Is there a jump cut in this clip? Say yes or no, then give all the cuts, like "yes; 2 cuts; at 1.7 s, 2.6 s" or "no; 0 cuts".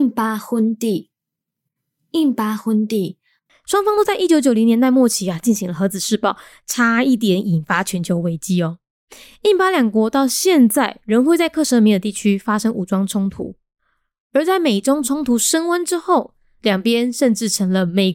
yes; 1 cut; at 3.5 s